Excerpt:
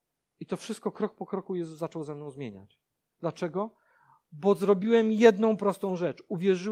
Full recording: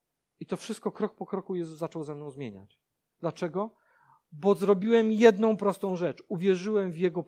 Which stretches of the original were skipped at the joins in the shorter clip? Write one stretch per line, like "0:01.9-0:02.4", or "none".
none